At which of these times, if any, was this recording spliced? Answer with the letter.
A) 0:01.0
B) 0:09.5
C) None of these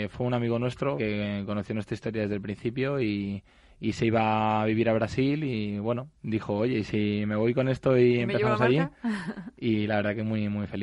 A